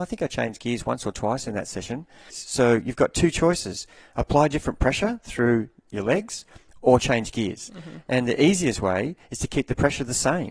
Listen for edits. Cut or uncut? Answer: cut